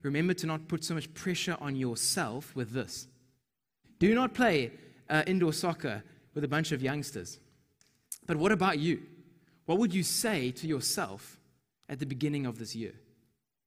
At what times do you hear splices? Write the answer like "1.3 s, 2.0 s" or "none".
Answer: 3.8 s